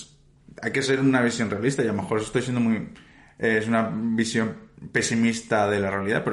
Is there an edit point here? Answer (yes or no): no